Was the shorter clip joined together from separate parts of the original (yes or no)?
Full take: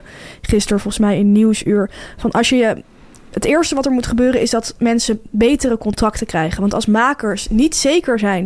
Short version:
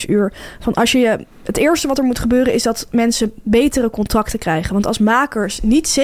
yes